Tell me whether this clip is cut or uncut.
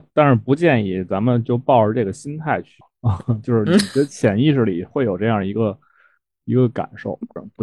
uncut